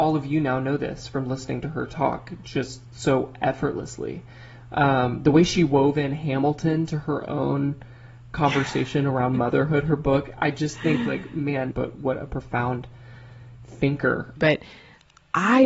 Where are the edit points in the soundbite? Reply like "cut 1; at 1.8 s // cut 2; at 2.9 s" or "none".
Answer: cut 1; at 11.7 s // cut 2; at 14.4 s